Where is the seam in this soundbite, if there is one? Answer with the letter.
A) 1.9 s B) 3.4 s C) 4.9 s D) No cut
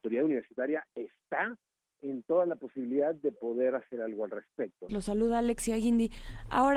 C